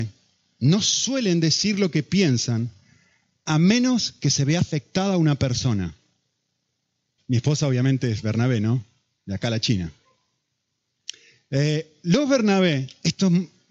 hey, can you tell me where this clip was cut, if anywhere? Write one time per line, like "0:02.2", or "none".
0:07.2